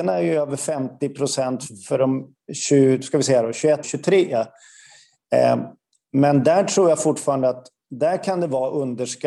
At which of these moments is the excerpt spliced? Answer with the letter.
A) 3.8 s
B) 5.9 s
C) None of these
A